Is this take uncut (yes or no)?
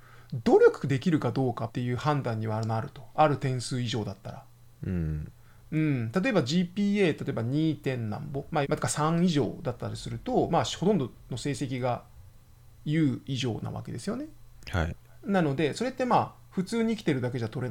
no